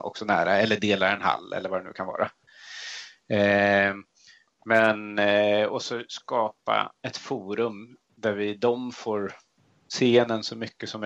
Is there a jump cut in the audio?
no; 0 cuts

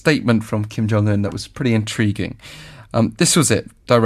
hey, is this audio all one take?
yes; 0 cuts

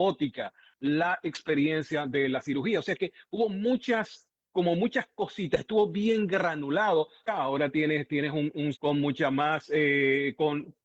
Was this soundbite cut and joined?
yes; 2 cuts; at 7.3 s, 8.7 s

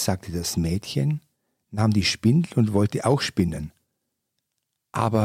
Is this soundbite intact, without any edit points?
yes; 0 cuts

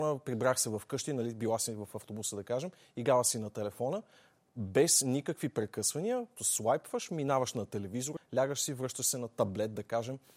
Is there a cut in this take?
yes; 2 cuts; at 6.4 s, 8.2 s

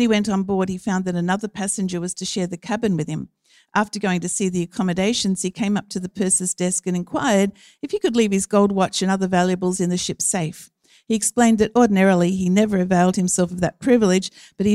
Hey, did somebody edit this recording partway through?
no; 0 cuts

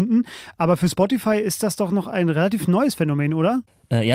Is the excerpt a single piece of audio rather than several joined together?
yes; 0 cuts

